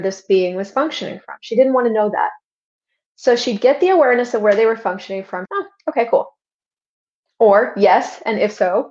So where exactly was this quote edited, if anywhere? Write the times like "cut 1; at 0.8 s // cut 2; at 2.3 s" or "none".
cut 1; at 5.5 s